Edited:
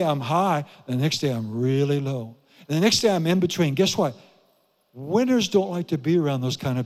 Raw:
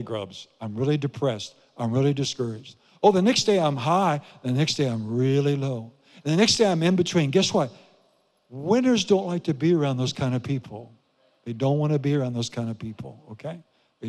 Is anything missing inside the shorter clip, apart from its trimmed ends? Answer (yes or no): no